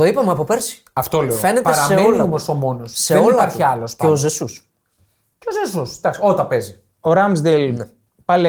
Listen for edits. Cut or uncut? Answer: uncut